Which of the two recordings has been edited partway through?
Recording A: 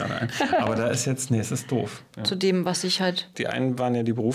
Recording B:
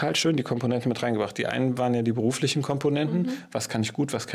A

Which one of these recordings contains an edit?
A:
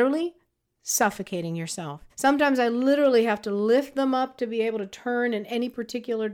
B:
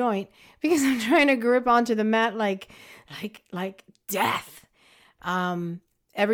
A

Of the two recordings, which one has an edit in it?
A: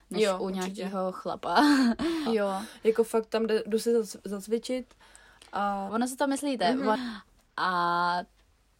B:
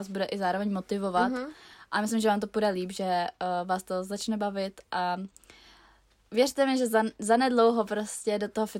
A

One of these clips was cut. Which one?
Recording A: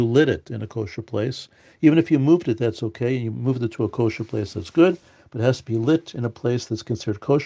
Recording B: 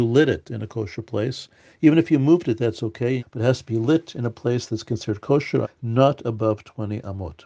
B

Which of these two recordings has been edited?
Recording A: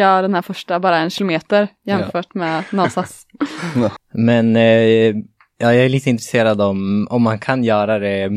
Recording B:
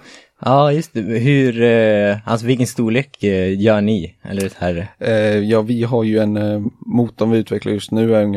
A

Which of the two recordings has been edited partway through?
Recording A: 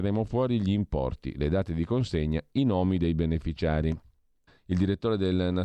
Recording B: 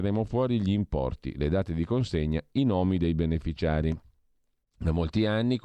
A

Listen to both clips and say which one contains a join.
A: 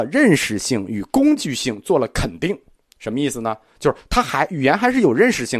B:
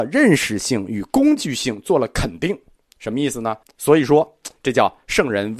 B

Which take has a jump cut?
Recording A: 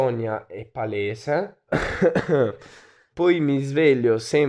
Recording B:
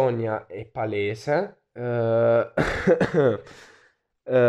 A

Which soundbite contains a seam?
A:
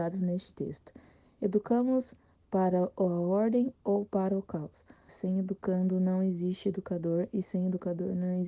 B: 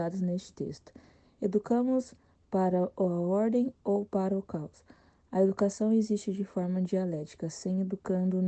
A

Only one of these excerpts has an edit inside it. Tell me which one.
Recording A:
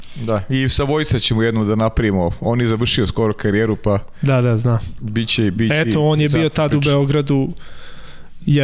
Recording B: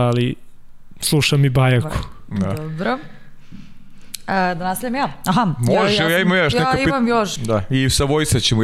B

